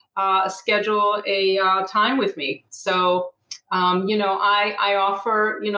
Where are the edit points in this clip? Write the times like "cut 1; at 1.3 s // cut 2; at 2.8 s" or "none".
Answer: none

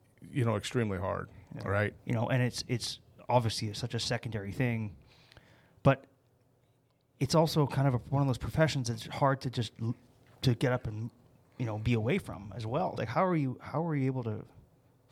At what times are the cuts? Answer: cut 1; at 2.0 s // cut 2; at 13.0 s

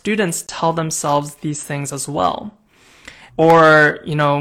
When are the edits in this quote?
cut 1; at 3.3 s

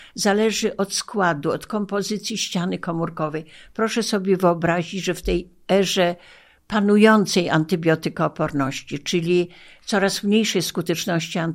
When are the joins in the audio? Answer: none

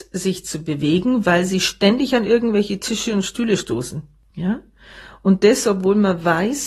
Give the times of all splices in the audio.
none

